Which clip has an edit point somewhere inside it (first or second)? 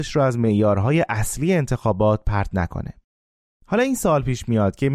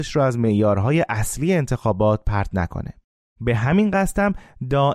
second